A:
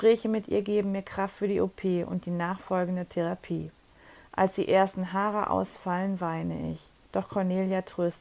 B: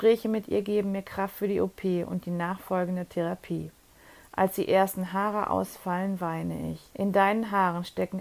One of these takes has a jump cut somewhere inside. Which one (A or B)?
B